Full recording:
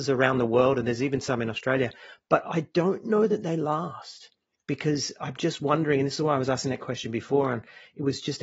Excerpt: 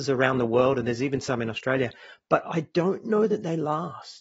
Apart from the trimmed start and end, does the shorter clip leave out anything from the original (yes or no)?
no